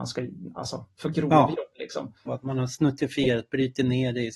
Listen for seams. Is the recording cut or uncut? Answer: cut